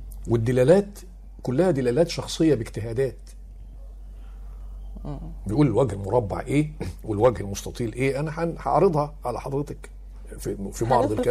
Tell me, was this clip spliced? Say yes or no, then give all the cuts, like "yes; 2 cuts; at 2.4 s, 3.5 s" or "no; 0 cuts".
no; 0 cuts